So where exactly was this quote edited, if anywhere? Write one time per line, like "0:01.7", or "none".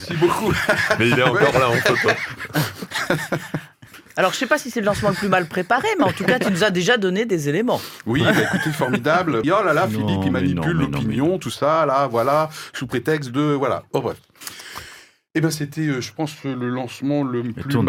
0:09.4